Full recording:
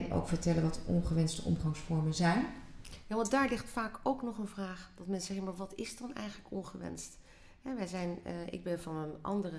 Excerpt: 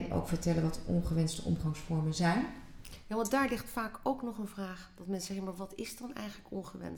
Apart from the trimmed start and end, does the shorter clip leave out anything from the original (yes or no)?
no